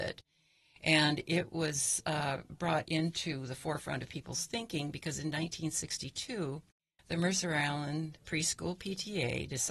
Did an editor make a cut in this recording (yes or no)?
no